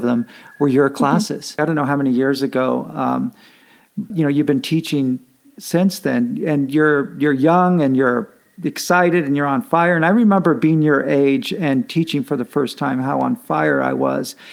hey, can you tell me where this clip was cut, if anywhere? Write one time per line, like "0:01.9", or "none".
0:01.6
0:04.1